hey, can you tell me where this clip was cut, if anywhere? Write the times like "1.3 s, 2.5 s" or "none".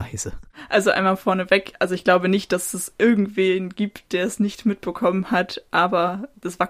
none